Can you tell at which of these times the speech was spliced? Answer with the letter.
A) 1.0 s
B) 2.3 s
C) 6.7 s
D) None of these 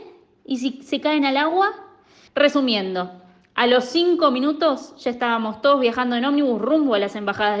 B